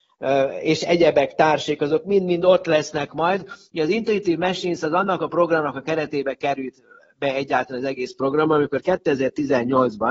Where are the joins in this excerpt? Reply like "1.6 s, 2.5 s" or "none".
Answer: none